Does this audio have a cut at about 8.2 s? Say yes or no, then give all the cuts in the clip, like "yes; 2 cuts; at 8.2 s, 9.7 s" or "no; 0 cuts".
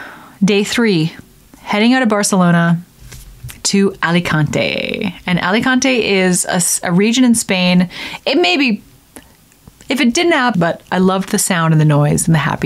yes; 2 cuts; at 8.2 s, 10.5 s